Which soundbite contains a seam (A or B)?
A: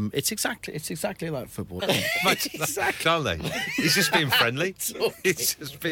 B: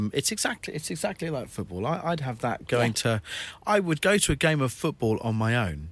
A